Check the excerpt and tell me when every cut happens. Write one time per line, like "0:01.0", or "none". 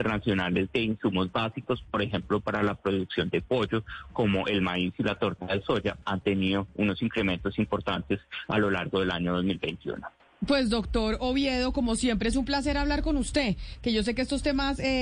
0:06.0